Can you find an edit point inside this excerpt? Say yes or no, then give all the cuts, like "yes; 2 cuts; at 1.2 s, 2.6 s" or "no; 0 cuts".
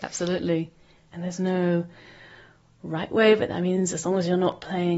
yes; 1 cut; at 1.1 s